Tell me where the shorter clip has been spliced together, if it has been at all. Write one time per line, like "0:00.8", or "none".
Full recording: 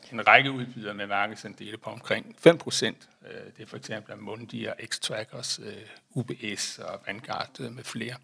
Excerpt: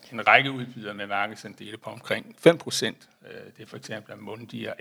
none